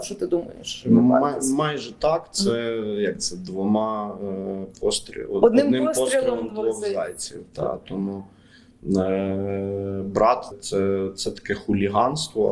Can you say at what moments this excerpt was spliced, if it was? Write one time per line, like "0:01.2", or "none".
0:10.5

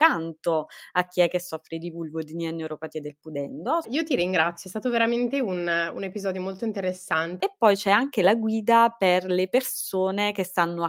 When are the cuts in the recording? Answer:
0:03.8
0:07.4

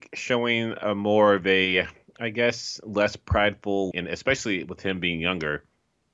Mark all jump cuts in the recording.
0:03.9

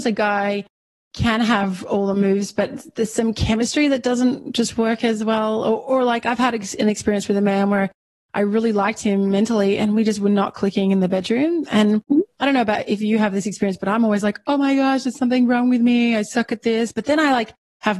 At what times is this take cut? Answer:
none

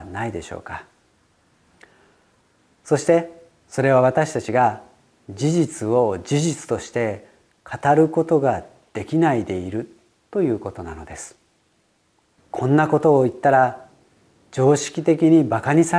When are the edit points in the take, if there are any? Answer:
0:12.4

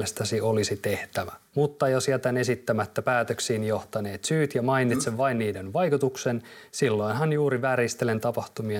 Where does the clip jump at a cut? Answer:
0:01.5

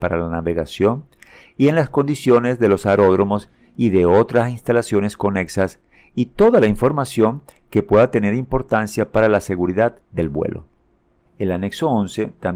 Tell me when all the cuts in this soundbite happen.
0:11.3

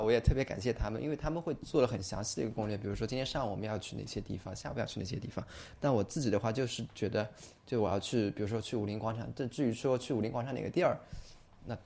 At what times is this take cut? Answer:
none

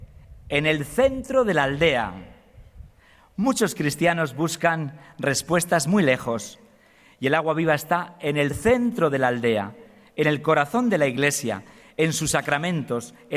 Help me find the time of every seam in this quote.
none

